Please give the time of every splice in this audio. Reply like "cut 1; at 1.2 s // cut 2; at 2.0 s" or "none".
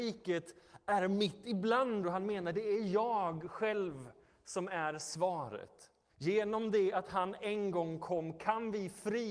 cut 1; at 2.0 s // cut 2; at 6.1 s

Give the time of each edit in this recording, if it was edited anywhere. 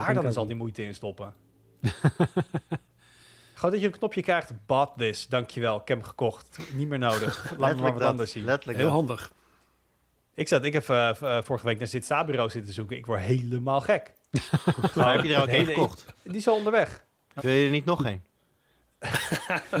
cut 1; at 16.1 s // cut 2; at 17.4 s

